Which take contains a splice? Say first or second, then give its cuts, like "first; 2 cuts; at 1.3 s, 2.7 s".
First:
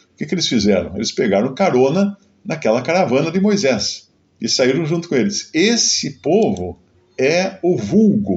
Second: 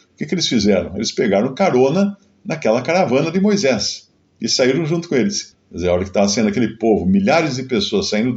second; 1 cut; at 5.5 s